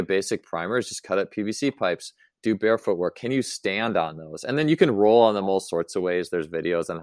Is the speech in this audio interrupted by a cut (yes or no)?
no